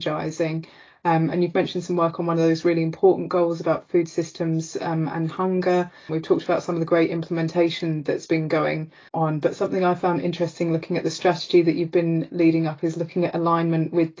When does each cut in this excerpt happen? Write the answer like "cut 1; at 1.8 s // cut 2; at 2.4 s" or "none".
cut 1; at 6.1 s // cut 2; at 9.1 s